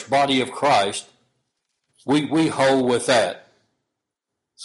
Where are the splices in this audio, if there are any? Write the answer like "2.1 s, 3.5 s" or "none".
1.9 s